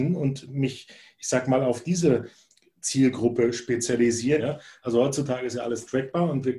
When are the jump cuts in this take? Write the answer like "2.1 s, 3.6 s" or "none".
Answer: 4.4 s